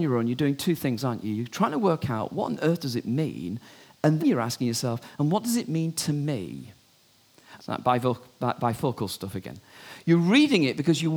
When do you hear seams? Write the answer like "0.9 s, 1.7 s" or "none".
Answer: 4.2 s, 7.6 s